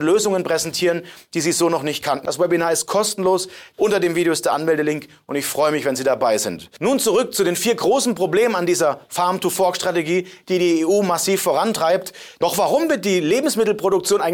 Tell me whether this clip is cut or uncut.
cut